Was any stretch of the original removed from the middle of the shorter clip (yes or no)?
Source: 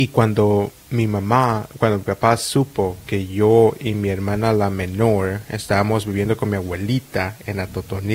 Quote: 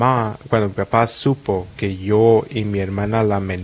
no